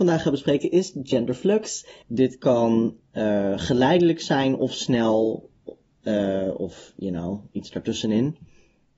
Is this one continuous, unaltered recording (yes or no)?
no